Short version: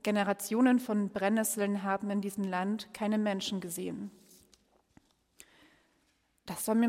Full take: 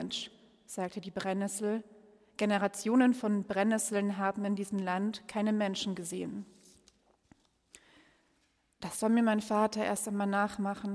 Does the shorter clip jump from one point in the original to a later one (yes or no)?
no